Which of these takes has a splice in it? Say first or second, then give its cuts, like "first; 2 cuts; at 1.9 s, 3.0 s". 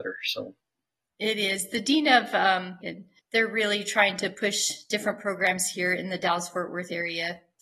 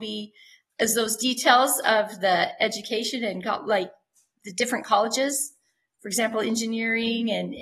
first; 1 cut; at 2.8 s